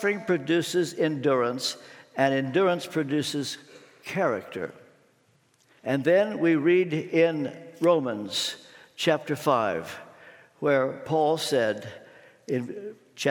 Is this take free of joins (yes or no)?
no